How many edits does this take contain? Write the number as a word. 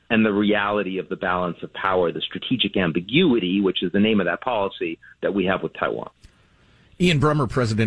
zero